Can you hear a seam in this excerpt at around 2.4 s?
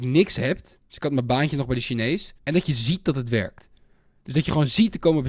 yes; 1 cut; at 2.4 s

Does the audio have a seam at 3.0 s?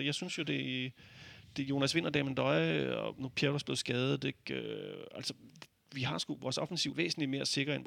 no; 1 cut; at 6.9 s

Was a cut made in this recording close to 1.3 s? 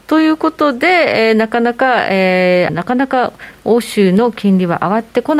no; 1 cut; at 2.7 s

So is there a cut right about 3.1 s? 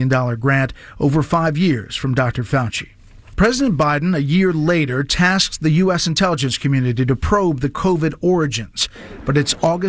no; 0 cuts

